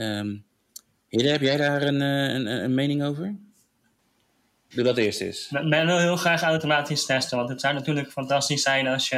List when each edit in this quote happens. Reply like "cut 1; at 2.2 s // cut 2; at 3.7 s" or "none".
cut 1; at 4.7 s